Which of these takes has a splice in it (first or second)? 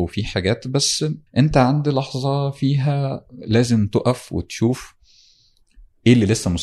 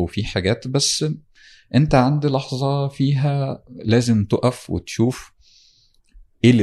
first